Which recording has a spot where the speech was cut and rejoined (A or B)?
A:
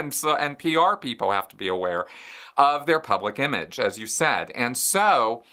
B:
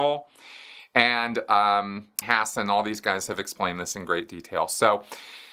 B